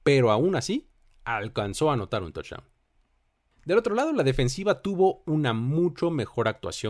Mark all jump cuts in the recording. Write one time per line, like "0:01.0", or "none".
none